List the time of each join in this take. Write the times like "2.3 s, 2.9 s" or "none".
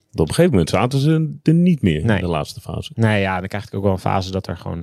none